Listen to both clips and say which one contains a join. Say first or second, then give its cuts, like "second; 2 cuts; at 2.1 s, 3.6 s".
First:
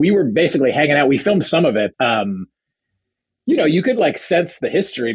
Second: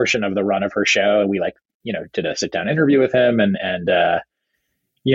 first; 1 cut; at 1.9 s